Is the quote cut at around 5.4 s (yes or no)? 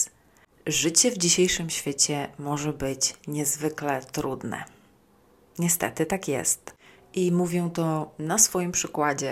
no